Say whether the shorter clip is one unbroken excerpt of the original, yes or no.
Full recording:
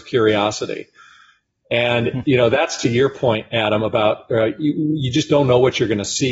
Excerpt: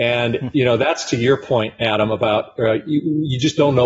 yes